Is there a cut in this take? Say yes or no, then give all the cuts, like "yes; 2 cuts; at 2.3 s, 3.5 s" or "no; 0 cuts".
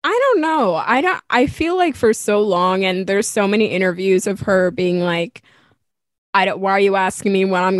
no; 0 cuts